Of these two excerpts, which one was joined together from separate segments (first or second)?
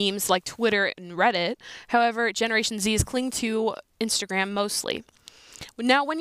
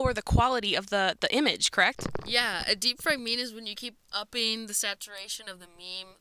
second